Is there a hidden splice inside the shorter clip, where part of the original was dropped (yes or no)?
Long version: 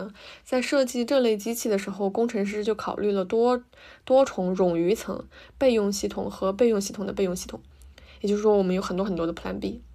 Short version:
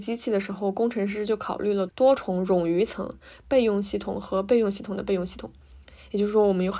yes